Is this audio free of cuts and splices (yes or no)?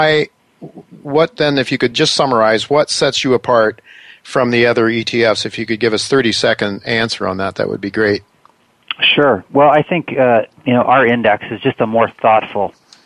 yes